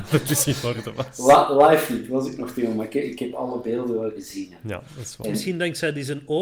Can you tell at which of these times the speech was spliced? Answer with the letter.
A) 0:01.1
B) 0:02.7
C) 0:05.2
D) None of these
C